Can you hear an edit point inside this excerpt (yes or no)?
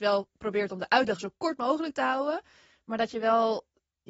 no